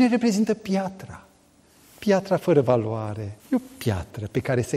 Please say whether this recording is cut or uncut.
cut